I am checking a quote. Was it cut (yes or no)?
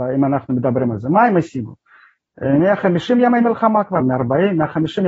yes